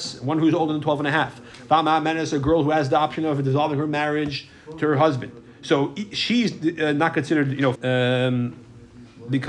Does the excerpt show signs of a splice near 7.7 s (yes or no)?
yes